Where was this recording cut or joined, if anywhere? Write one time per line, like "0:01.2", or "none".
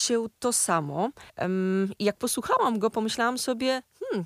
0:01.3